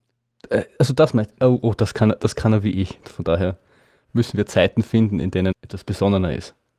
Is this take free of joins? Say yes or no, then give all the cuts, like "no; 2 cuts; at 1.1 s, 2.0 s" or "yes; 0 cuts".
no; 2 cuts; at 3.0 s, 5.5 s